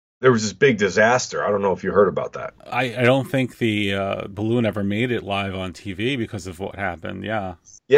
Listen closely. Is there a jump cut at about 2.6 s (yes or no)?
no